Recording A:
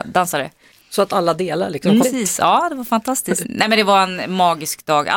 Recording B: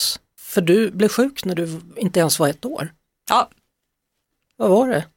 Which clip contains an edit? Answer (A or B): A